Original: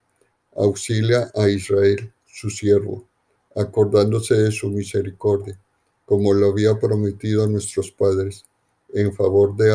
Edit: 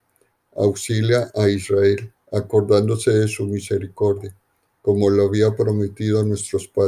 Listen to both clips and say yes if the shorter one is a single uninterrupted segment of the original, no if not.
no